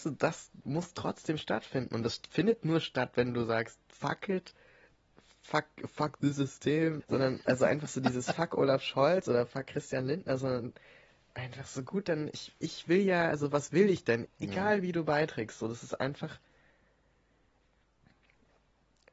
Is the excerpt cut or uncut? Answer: cut